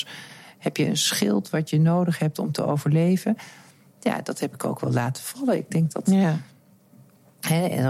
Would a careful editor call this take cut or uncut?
uncut